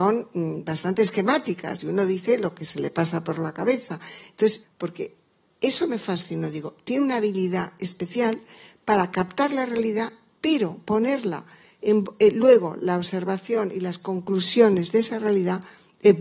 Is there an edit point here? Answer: yes; 1 cut; at 4.6 s

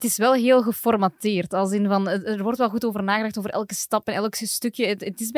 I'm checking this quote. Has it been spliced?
no; 0 cuts

